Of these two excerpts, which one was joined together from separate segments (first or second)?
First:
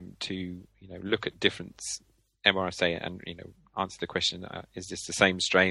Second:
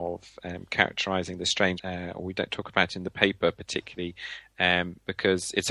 second